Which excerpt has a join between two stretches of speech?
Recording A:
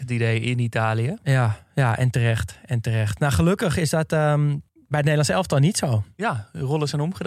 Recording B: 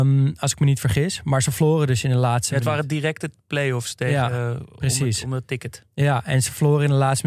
A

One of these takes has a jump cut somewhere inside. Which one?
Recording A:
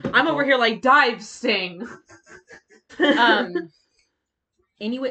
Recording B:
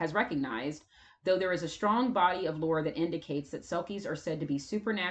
A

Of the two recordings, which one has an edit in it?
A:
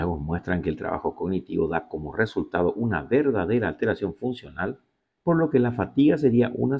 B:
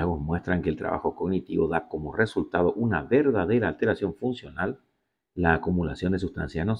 A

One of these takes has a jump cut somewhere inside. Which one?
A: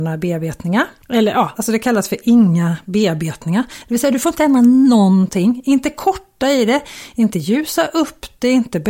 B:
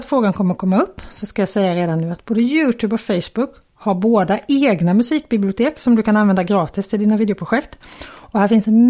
A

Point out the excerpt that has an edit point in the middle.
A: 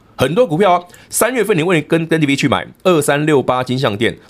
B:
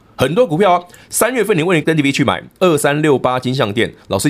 B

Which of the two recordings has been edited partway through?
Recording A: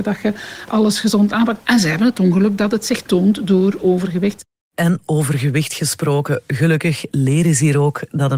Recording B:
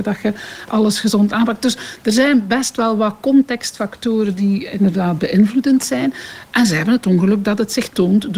A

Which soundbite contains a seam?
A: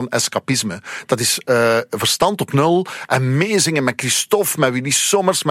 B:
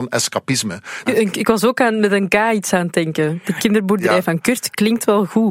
B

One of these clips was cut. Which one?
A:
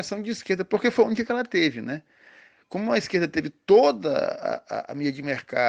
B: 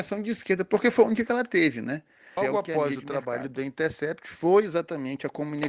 B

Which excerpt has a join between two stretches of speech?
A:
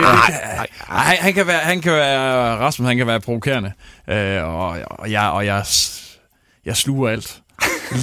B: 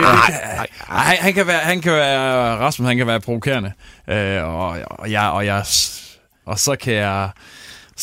B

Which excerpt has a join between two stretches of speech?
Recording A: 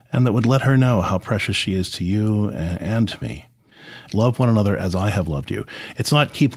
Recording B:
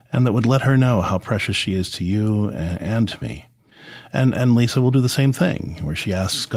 A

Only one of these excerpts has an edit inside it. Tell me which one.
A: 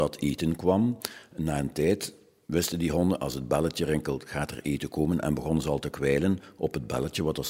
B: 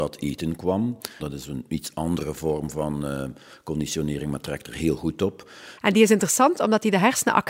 B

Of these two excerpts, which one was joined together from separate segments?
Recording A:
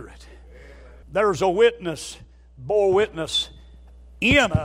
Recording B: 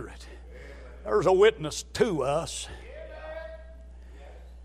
A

